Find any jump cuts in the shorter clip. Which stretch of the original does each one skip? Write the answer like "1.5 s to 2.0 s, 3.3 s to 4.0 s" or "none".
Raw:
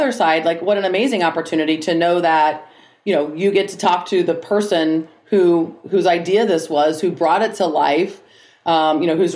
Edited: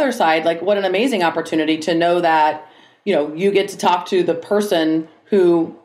none